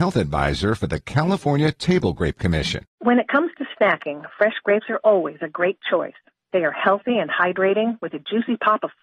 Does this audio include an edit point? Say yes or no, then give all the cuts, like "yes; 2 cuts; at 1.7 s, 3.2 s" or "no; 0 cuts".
no; 0 cuts